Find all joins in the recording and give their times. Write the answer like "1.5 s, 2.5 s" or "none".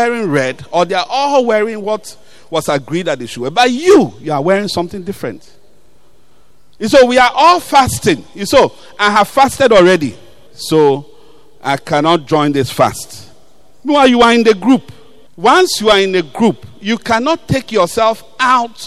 none